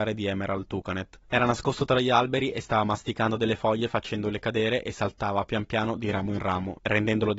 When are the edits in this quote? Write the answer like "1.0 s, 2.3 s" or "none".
none